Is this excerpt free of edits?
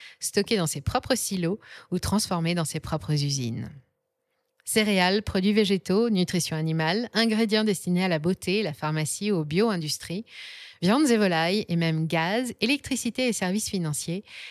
yes; 0 cuts

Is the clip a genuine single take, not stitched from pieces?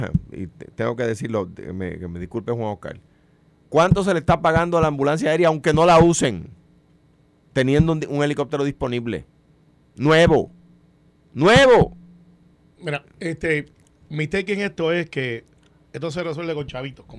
no; 1 cut; at 12.7 s

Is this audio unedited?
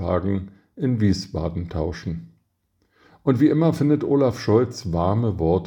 yes; 0 cuts

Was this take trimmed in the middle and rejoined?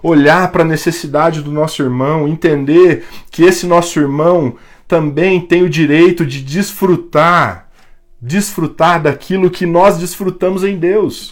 no; 0 cuts

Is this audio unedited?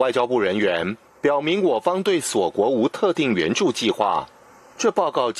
yes; 0 cuts

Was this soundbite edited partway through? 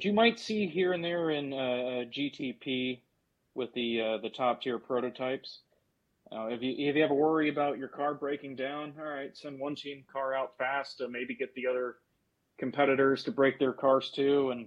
no; 0 cuts

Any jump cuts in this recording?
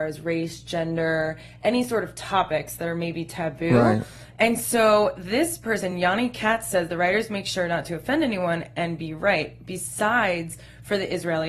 no; 0 cuts

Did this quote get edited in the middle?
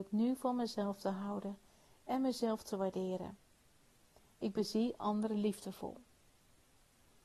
no; 0 cuts

